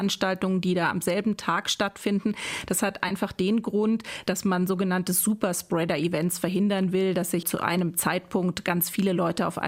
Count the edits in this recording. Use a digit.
1